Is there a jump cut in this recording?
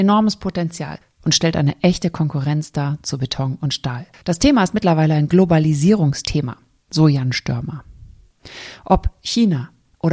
no; 0 cuts

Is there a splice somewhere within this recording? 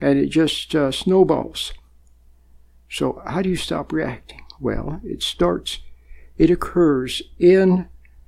no; 0 cuts

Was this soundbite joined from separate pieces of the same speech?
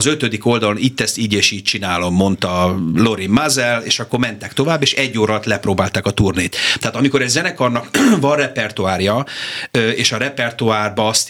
no; 0 cuts

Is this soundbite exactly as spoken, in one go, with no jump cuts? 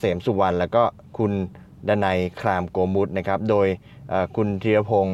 yes; 0 cuts

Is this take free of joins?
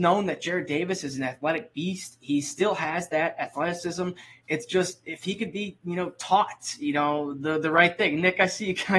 yes; 0 cuts

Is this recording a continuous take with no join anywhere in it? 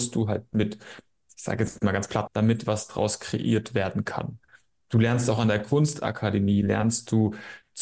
no; 1 cut; at 2.3 s

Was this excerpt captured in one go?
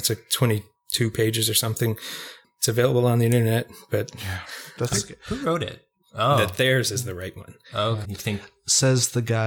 no; 2 cuts; at 6.0 s, 8.0 s

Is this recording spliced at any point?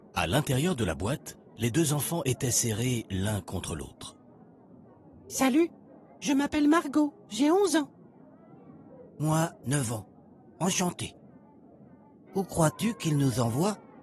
yes; 2 cuts; at 9.6 s, 12.3 s

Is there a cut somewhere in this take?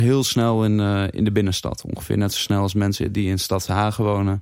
no; 0 cuts

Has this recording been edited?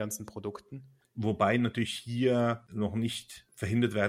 yes; 1 cut; at 1.0 s

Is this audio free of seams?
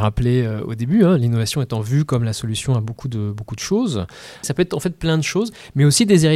no; 1 cut; at 4.4 s

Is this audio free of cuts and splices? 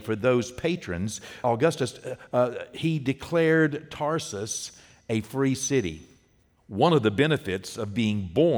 no; 1 cut; at 1.4 s

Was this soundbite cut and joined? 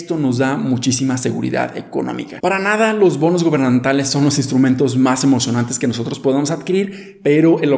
no; 0 cuts

